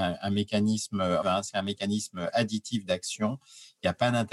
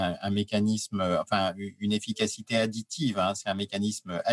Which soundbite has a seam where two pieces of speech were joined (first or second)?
first